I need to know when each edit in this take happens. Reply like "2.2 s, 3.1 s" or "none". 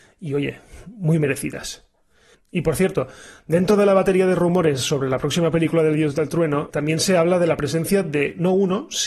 6.7 s